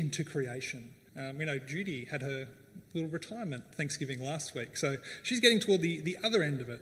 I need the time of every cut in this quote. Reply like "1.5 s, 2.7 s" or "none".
1.1 s

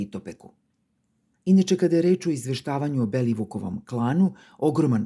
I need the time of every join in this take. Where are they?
1.3 s

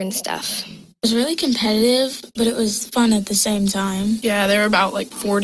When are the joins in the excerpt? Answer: none

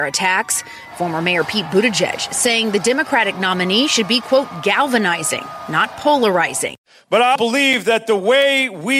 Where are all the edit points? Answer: 7.4 s

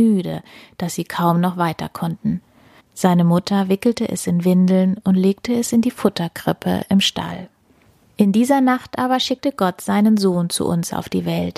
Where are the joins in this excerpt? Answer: 2.8 s, 8.0 s

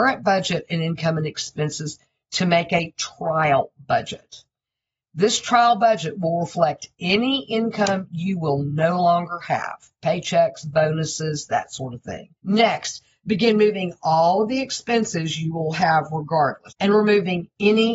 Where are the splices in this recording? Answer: 12.4 s, 16.7 s

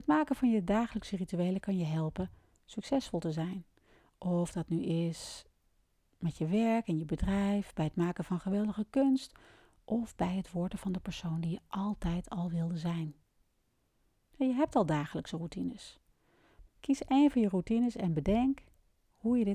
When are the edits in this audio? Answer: 16.7 s

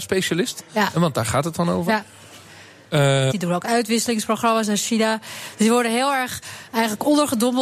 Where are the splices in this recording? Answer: 3.3 s

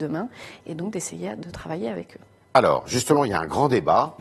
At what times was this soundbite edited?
none

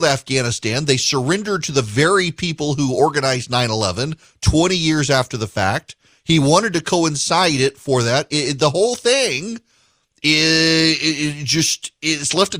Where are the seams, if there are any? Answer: none

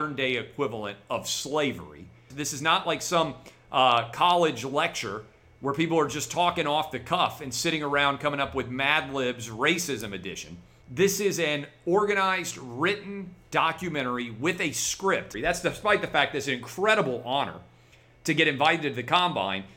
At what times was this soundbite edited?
2.3 s, 10.8 s, 15.3 s

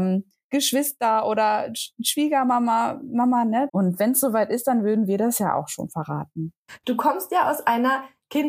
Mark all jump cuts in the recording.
3.7 s, 6.8 s

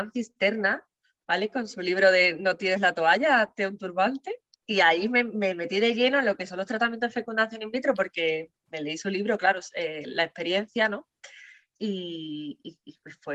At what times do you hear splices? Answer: none

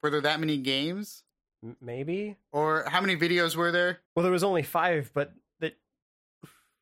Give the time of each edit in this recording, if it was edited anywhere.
4.1 s

